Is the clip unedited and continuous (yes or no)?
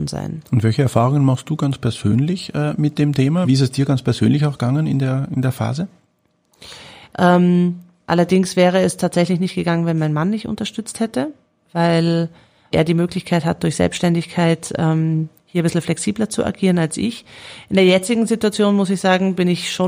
no